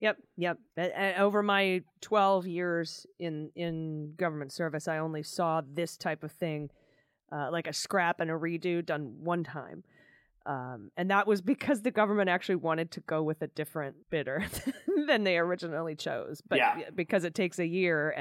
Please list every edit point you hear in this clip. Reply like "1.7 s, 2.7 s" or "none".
14.0 s